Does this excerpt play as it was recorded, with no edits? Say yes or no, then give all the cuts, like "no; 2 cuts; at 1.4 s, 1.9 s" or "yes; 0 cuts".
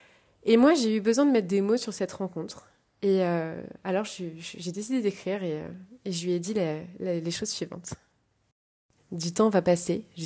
no; 1 cut; at 9.0 s